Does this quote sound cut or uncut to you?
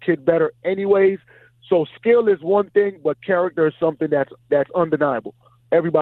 uncut